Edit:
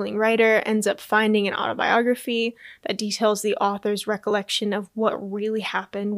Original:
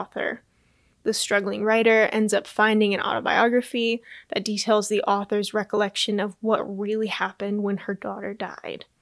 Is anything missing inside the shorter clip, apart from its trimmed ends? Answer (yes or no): no